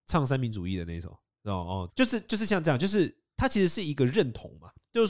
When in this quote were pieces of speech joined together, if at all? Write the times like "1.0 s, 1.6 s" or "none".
1.9 s